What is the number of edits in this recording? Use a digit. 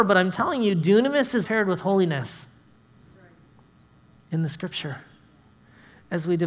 1